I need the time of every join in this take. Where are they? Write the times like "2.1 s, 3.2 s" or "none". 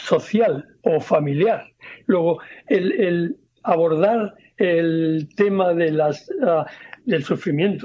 2.0 s